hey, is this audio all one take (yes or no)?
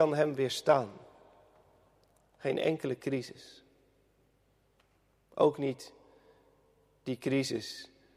yes